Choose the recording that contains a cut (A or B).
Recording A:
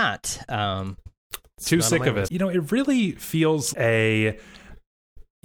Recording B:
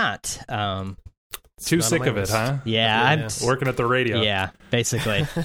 A